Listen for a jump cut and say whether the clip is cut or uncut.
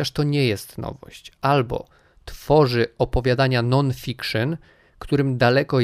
uncut